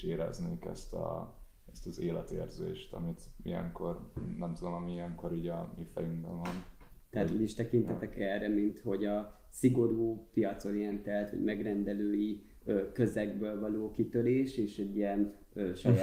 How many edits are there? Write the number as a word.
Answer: zero